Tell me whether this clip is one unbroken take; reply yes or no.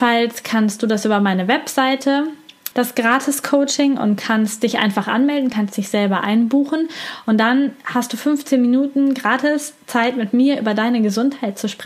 no